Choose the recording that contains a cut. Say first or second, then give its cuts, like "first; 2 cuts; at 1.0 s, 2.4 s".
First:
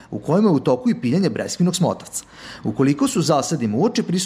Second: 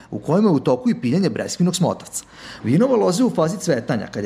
second; 1 cut; at 2.6 s